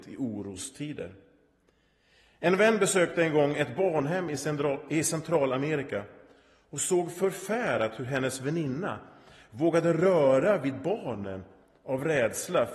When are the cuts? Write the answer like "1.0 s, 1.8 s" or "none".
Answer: none

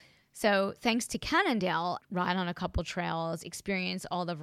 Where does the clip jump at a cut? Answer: 2.0 s

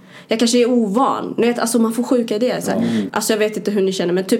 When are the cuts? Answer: 3.1 s

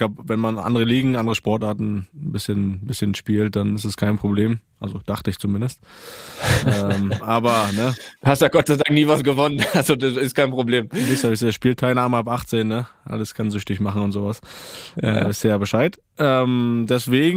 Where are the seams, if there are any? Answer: 8.2 s

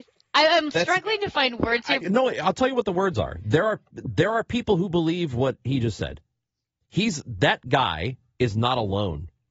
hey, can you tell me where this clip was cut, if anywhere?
2.0 s

